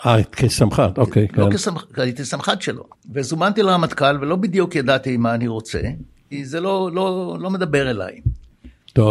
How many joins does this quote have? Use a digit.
2